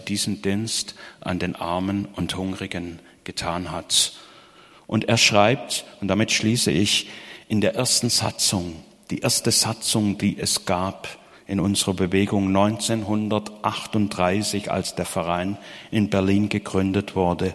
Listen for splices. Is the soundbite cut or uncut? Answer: uncut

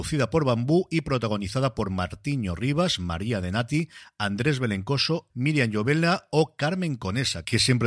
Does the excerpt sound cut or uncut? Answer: cut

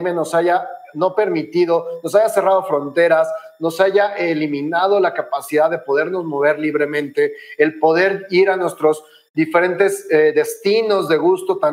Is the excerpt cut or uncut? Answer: cut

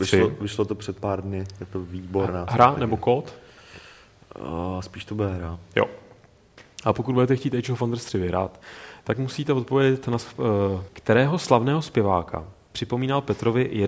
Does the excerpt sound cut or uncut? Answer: cut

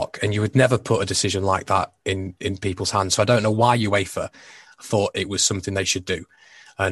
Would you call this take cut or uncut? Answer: uncut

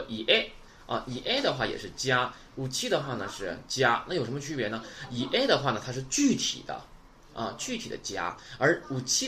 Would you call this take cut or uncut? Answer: uncut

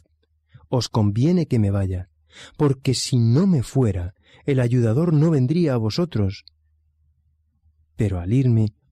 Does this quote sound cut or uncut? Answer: uncut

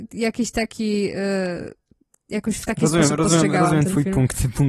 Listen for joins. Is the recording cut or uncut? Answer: uncut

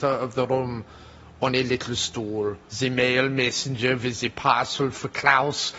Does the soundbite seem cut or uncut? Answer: cut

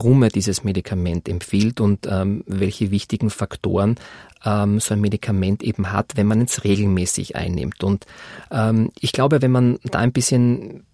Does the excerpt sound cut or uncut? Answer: uncut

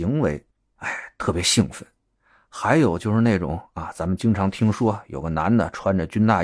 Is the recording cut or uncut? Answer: uncut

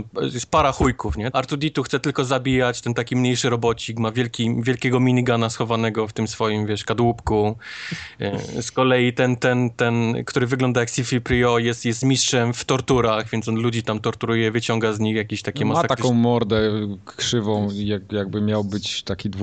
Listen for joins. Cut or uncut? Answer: cut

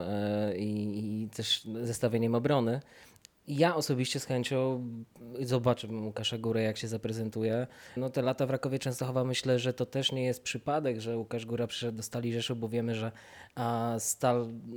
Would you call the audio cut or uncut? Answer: cut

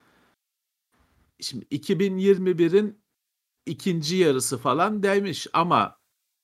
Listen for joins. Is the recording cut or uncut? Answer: uncut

